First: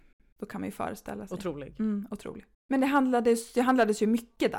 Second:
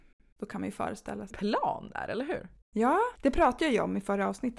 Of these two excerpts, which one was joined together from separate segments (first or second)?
second